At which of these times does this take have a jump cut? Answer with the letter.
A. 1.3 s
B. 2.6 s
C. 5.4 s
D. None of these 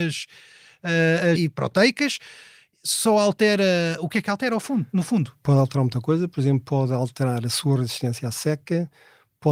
A